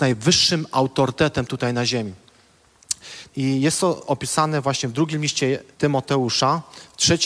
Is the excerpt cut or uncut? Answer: cut